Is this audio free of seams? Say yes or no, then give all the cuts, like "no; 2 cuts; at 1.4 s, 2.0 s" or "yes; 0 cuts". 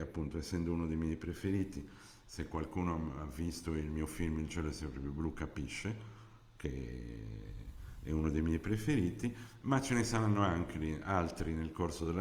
yes; 0 cuts